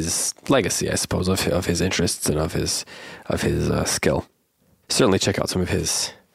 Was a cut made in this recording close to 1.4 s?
no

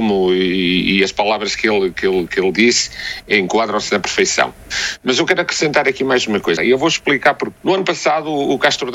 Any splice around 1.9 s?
no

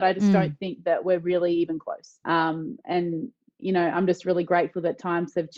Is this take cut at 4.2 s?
no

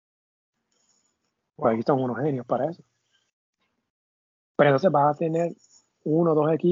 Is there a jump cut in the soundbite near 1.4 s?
no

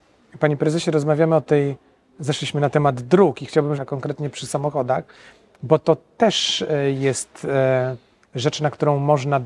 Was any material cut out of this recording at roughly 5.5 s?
no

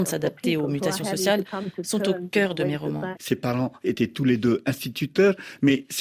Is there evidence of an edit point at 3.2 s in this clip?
yes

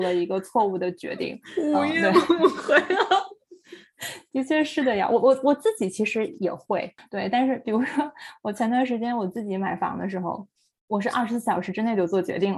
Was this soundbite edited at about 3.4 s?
no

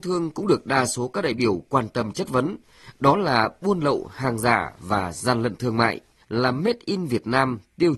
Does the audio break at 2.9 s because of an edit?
no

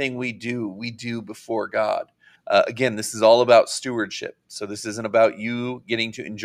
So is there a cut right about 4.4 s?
no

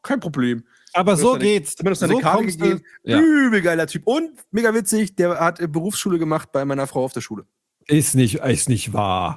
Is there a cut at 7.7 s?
no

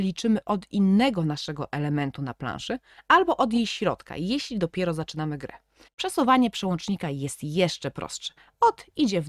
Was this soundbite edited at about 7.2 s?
no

